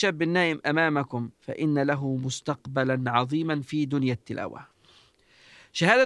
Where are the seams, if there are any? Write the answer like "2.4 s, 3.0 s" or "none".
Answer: 1.3 s